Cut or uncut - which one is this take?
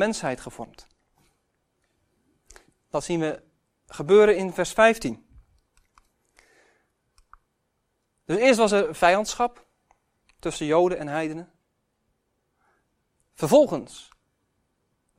uncut